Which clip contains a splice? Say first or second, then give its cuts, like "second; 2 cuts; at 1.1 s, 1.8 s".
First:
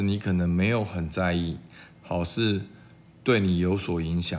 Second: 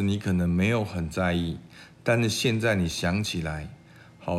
first; 1 cut; at 2.0 s